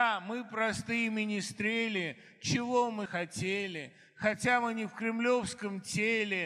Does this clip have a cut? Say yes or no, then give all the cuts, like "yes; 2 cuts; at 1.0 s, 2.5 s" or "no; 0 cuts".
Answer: yes; 1 cut; at 3.1 s